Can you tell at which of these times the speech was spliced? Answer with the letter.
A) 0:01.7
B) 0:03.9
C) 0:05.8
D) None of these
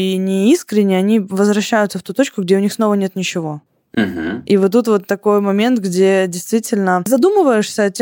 D